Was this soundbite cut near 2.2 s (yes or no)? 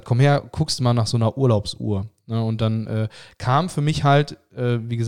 no